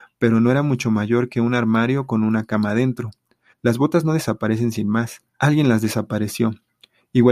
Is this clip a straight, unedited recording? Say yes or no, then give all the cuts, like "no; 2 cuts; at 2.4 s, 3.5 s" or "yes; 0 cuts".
no; 2 cuts; at 3.5 s, 5.3 s